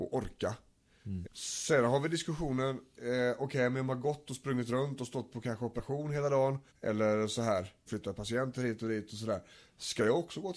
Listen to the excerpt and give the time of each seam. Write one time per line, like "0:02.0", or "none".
0:01.2
0:06.7
0:07.9